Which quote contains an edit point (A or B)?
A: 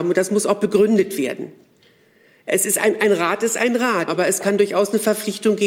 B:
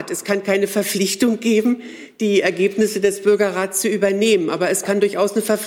A